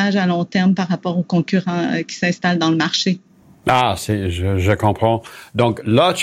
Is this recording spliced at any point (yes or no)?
no